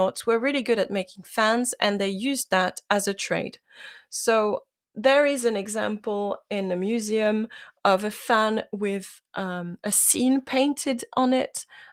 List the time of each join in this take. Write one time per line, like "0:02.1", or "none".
none